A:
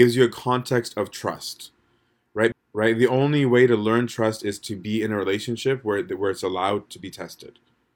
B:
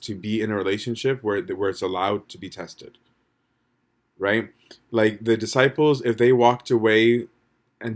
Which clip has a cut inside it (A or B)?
A